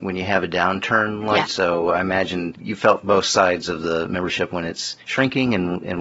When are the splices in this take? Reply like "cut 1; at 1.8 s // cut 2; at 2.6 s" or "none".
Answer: cut 1; at 1.5 s